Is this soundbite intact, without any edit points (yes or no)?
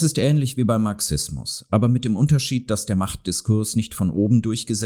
yes